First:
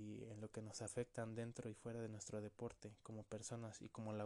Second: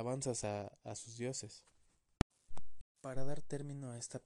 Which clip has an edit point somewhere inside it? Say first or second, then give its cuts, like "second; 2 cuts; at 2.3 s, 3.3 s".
second; 1 cut; at 2.8 s